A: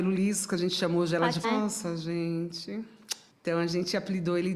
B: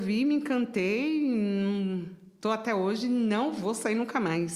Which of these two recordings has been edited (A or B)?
A